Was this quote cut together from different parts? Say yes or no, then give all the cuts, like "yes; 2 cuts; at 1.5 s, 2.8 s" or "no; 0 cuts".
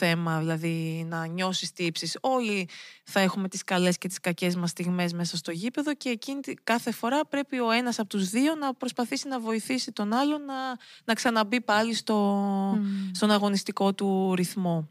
no; 0 cuts